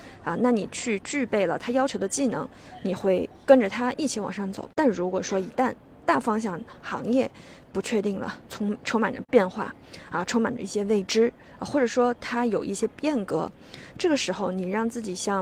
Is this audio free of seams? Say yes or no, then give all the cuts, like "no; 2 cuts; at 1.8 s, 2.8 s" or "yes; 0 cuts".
yes; 0 cuts